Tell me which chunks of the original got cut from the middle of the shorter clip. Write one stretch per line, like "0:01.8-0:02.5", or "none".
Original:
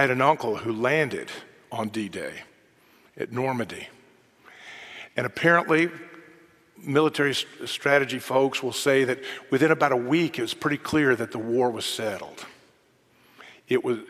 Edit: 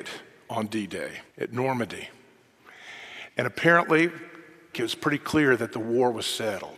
0:02.5-0:03.1
0:06.5-0:10.3